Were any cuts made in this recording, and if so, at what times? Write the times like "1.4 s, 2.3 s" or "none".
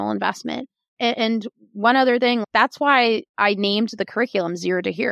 none

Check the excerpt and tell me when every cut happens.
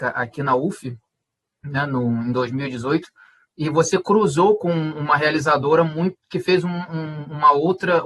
none

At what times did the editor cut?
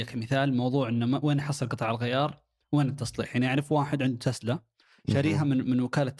none

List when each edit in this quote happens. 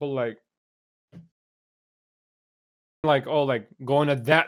3.0 s

